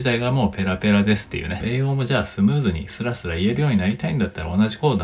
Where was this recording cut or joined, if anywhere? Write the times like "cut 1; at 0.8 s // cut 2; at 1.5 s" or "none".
cut 1; at 1.6 s